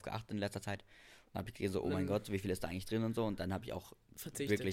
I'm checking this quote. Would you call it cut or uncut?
uncut